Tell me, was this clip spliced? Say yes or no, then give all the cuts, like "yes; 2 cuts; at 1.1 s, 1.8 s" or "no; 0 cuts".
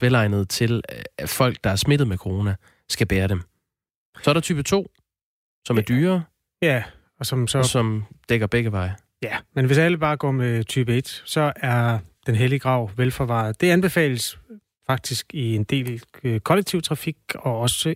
no; 0 cuts